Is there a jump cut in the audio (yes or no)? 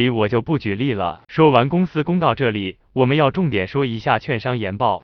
yes